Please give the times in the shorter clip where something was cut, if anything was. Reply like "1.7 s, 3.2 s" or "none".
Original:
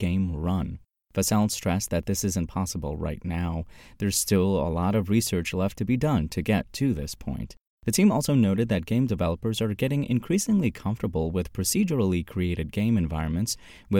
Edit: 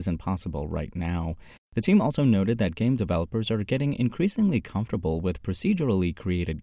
1.6 s